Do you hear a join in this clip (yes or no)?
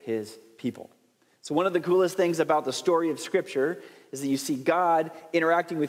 no